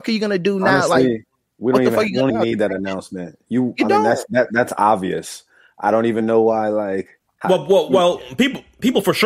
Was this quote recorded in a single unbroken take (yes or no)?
no